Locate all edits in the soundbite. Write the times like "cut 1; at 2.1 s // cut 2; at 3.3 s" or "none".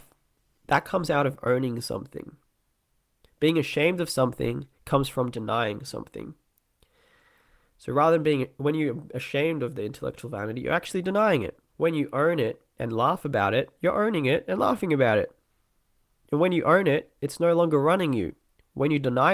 cut 1; at 11.7 s